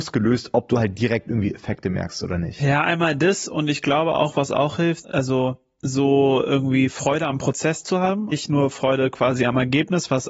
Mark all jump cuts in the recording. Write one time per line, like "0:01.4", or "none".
0:05.0
0:08.3